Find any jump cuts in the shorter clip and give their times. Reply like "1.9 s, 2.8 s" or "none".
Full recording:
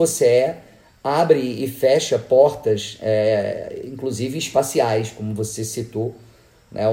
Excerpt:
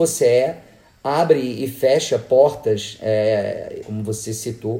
3.8 s